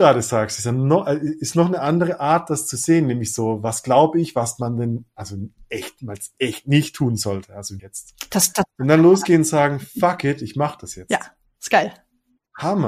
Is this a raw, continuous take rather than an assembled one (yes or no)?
no